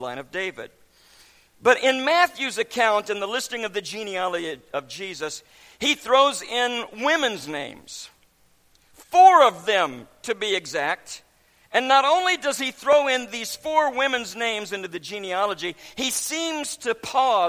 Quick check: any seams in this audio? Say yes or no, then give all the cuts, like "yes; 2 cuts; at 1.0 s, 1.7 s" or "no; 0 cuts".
no; 0 cuts